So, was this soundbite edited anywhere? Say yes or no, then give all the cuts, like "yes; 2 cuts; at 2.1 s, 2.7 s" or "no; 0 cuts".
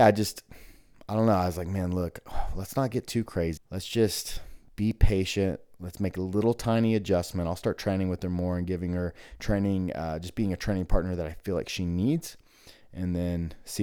yes; 1 cut; at 3.6 s